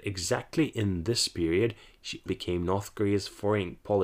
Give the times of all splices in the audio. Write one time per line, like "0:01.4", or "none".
0:02.3